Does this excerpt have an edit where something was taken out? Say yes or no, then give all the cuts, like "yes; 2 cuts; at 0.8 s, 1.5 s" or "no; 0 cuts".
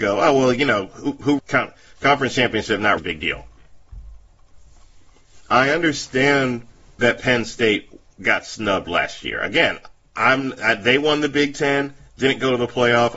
yes; 2 cuts; at 1.4 s, 3.0 s